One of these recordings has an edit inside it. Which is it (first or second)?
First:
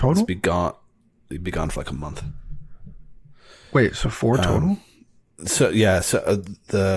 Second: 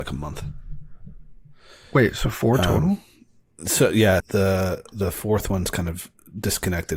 second